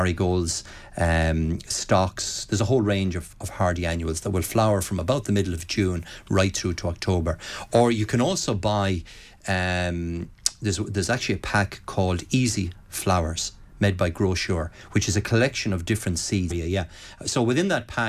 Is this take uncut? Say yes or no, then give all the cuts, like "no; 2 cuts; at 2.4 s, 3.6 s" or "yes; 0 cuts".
no; 1 cut; at 16.5 s